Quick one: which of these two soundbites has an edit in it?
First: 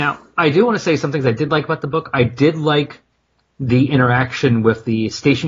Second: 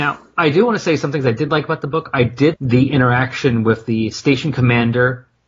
second; 1 cut; at 2.5 s

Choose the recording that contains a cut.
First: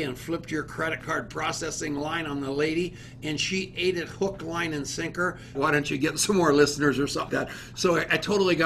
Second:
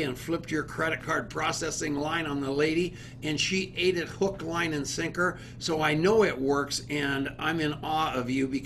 first; 2 cuts; at 5.6 s, 7.3 s

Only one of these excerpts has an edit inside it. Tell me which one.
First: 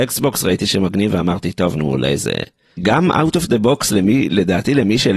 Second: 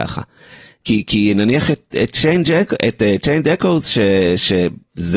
first; 1 cut; at 2.8 s

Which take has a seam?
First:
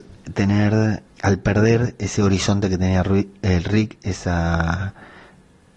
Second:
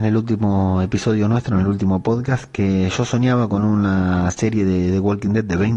first; 1 cut; at 1.1 s

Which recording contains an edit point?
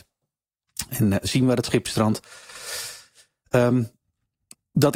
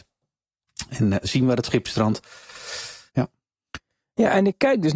second; 1 cut; at 3.1 s

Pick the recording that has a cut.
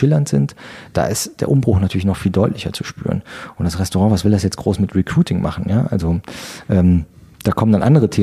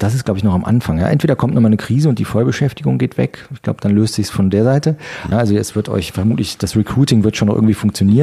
second; 1 cut; at 5.3 s

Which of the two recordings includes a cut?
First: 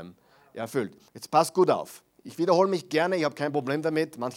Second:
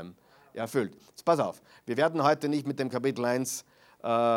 first; 1 cut; at 1.1 s

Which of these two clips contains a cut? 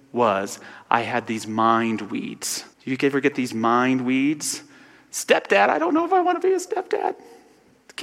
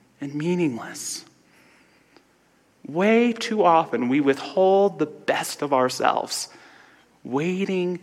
first; 1 cut; at 2.7 s

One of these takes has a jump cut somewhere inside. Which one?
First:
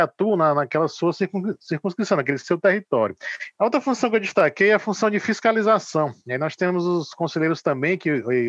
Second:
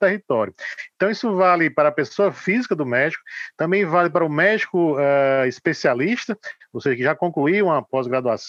first; 1 cut; at 3.6 s

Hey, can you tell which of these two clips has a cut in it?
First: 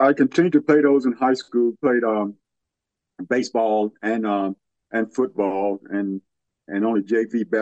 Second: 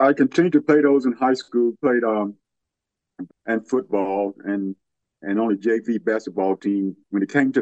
second; 1 cut; at 3.3 s

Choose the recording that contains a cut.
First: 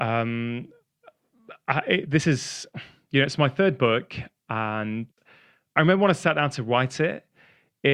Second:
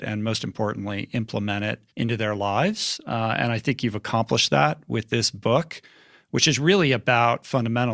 second; 1 cut; at 1.9 s

